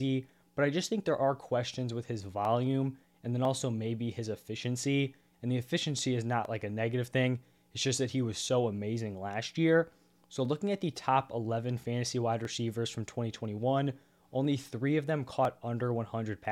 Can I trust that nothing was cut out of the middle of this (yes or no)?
yes